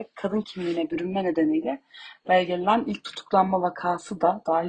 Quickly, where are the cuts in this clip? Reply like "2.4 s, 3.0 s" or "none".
none